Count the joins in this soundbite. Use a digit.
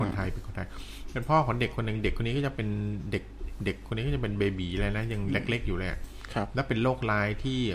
0